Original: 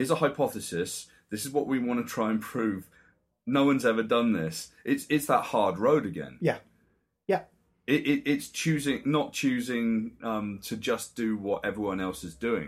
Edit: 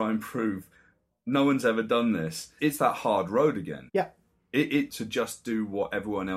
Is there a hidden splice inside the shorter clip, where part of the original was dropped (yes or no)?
yes